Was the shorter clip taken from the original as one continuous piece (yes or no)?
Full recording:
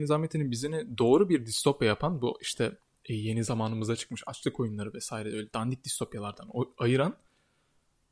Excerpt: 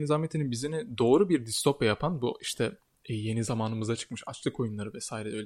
yes